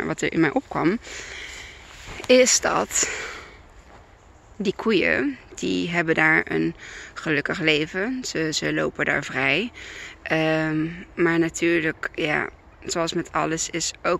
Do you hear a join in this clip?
no; 0 cuts

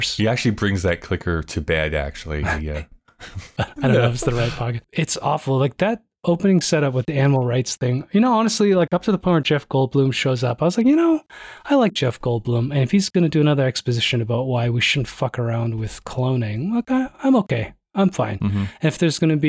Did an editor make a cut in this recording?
yes; 1 cut; at 3.6 s

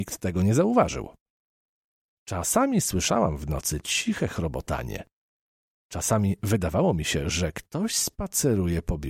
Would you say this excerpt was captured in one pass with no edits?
yes; 0 cuts

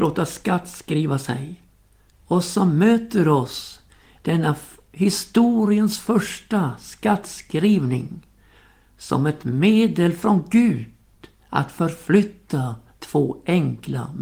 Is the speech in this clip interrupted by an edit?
yes; 1 cut; at 2.1 s

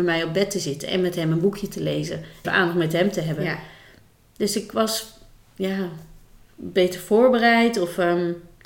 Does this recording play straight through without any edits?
no; 1 cut; at 2.4 s

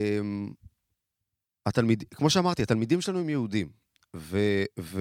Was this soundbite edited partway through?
no; 0 cuts

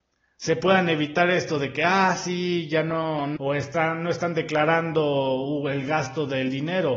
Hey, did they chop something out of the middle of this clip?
yes; 1 cut; at 3.4 s

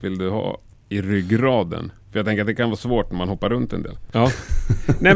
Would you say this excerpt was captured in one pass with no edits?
no; 1 cut; at 4.1 s

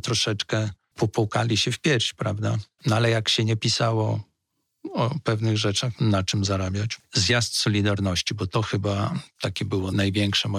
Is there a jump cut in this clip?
yes; 2 cuts; at 2.8 s, 6.0 s

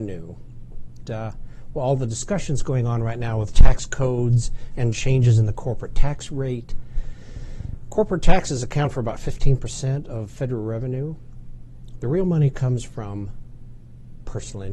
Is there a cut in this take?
yes; 1 cut; at 1.1 s

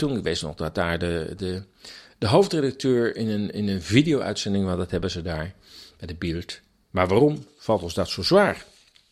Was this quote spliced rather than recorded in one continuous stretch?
yes; 1 cut; at 6.8 s

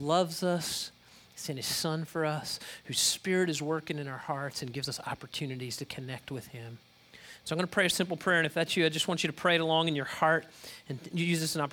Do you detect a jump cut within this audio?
no; 0 cuts

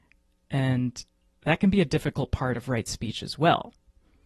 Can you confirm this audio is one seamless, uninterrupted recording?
yes; 0 cuts

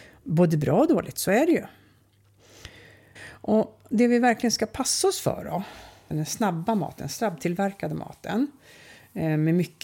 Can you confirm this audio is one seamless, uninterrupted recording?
no; 2 cuts; at 3.2 s, 6.1 s

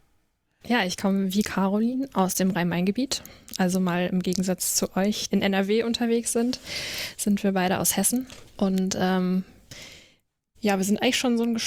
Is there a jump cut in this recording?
yes; 1 cut; at 5.3 s

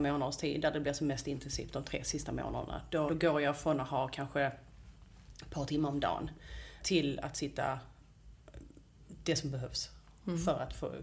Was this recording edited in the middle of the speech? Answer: yes; 2 cuts; at 3.1 s, 6.8 s

